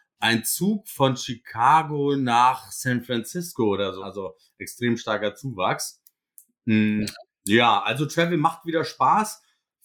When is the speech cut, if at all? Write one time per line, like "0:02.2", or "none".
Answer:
0:04.0